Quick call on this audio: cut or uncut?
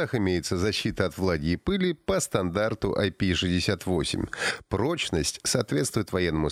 uncut